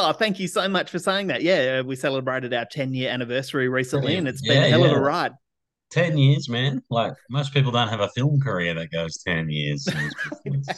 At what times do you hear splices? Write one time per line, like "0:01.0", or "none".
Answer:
none